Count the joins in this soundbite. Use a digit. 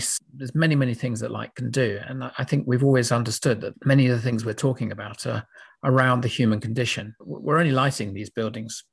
0